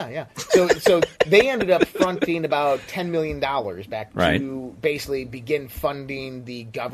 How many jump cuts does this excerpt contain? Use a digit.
1